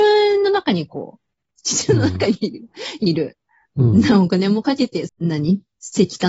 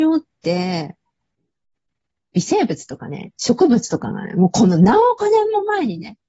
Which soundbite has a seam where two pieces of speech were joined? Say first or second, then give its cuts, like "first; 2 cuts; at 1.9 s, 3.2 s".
first; 2 cuts; at 1.6 s, 5.1 s